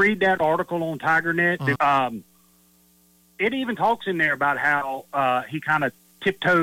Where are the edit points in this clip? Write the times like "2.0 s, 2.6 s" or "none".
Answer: 1.8 s